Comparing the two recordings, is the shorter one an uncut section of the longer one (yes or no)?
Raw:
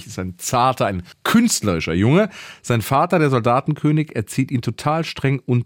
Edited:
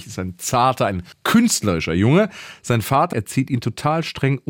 no